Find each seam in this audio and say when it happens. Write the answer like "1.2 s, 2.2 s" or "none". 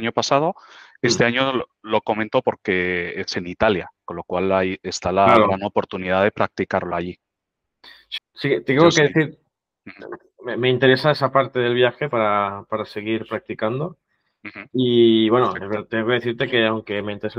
8.2 s